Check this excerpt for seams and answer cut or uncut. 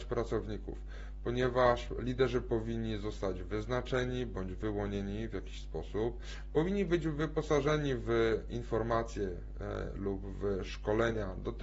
uncut